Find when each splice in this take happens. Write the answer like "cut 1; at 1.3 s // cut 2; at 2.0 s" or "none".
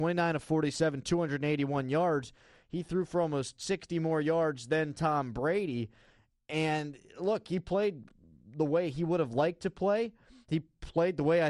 none